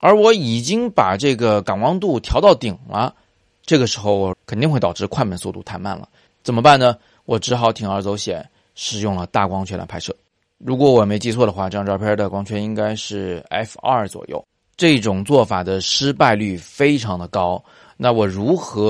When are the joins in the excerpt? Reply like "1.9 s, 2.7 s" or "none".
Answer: 4.3 s, 6.3 s